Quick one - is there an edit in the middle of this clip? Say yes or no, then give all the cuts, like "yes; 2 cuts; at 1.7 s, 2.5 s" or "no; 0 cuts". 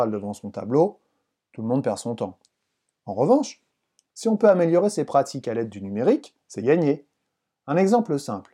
no; 0 cuts